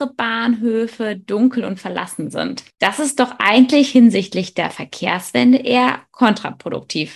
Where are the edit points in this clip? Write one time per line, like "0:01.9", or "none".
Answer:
none